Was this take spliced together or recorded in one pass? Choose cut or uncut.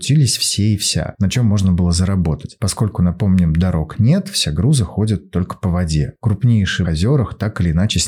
cut